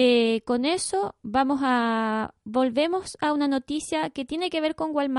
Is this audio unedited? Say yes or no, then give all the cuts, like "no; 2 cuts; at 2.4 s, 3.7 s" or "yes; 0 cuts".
no; 1 cut; at 1.2 s